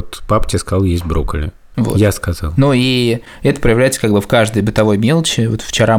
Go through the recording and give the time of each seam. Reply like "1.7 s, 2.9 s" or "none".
1.7 s